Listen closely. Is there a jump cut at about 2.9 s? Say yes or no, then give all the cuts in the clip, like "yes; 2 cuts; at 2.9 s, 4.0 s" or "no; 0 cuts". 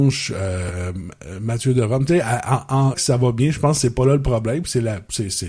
yes; 1 cut; at 2.9 s